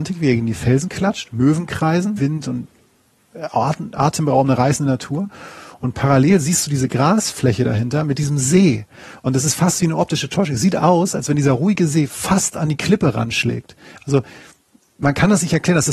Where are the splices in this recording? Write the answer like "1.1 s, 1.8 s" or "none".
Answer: 2.2 s